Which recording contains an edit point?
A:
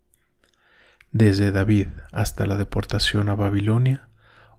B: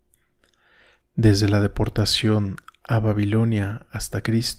B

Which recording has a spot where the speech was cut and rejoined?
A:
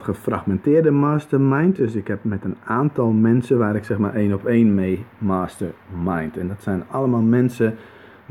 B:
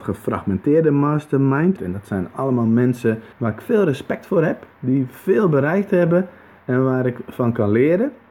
B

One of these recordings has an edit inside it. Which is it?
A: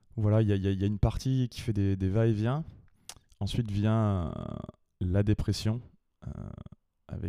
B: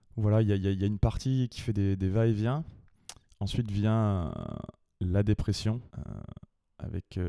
B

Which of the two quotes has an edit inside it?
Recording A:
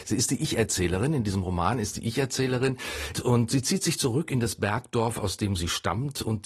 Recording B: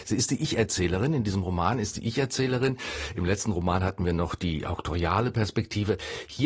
A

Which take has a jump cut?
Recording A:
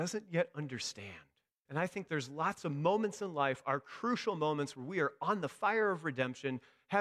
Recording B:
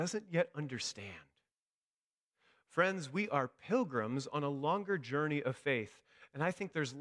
A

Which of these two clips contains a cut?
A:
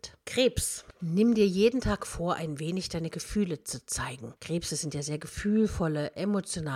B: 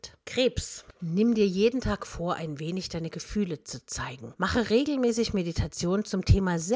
B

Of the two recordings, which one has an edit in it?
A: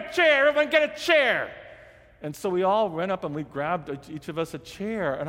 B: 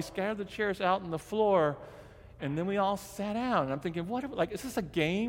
B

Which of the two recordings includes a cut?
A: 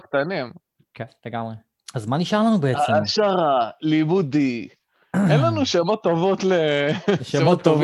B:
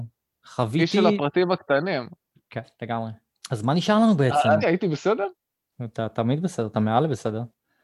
B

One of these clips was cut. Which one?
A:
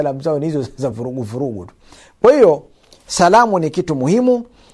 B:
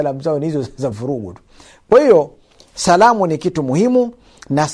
B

